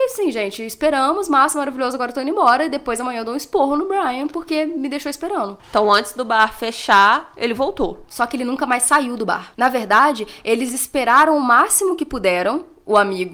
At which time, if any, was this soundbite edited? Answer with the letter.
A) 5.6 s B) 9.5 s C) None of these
A